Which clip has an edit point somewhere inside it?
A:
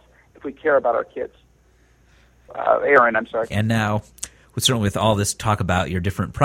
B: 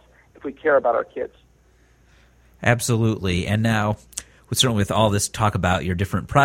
A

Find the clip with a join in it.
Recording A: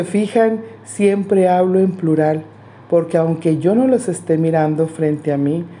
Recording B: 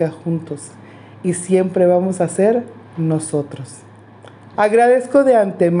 B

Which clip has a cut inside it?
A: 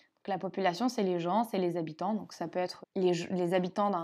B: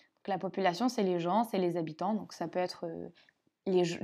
A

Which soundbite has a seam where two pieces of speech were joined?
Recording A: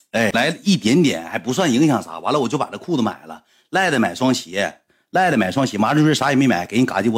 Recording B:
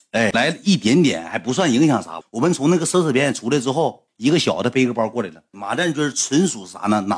B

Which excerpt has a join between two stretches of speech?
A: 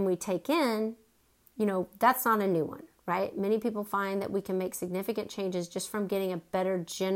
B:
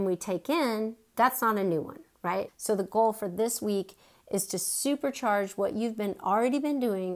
B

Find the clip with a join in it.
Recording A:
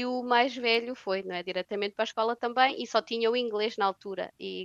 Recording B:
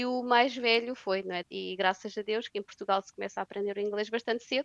B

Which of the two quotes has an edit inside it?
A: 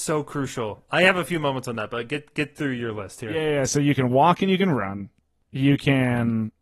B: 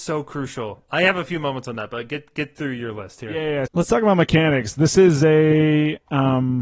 B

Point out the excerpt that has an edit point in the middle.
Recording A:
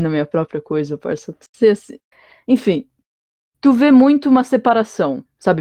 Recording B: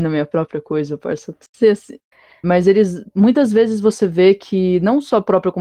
B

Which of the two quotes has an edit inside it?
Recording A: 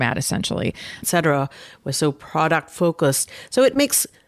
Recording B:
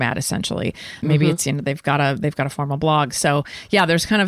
A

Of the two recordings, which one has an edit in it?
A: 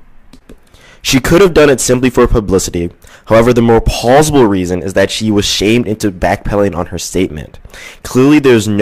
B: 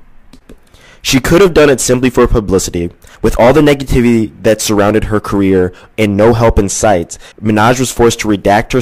B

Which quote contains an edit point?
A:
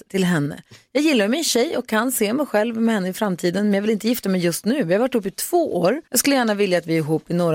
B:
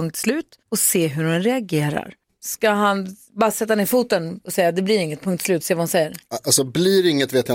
A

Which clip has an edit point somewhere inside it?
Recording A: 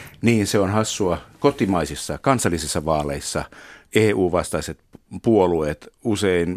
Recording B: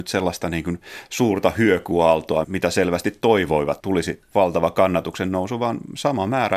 B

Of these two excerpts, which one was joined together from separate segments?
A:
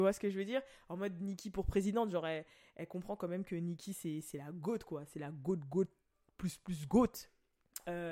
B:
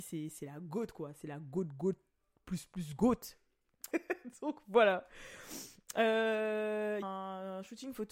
B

